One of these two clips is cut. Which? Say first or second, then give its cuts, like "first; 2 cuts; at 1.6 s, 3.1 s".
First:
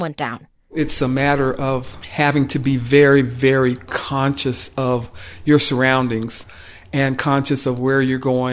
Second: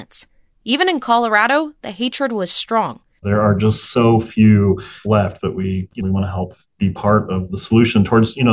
second; 1 cut; at 3.2 s